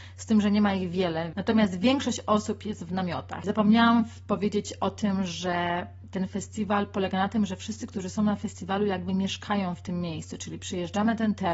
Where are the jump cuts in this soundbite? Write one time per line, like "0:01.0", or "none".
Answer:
0:01.3
0:03.4